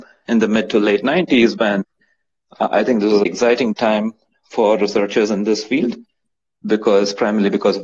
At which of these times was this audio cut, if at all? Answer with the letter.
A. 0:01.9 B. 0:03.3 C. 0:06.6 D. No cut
B